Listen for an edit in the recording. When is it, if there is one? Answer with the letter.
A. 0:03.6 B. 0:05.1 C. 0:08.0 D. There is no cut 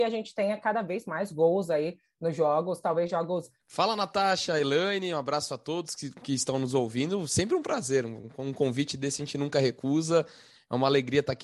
A